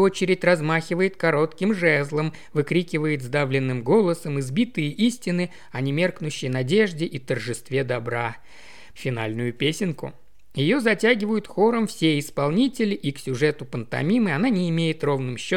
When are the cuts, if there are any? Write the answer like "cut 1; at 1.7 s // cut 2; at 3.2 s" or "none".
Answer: cut 1; at 9.0 s